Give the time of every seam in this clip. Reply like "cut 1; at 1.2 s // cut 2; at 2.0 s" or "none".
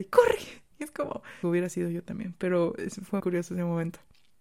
cut 1; at 1.4 s // cut 2; at 3.2 s